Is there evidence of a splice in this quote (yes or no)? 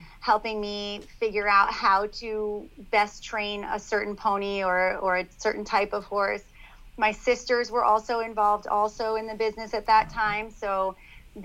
no